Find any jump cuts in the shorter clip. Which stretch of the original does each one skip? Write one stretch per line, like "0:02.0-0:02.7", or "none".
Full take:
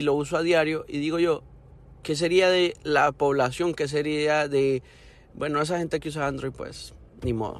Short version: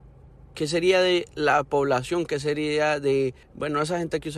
0:04.9-0:05.2